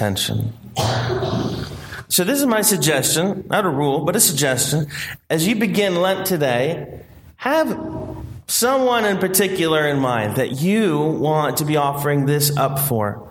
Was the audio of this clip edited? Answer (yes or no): no